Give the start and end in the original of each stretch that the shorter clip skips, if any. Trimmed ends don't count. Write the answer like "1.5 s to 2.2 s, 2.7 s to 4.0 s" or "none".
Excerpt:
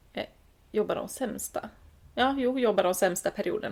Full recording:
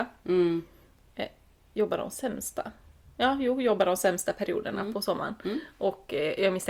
none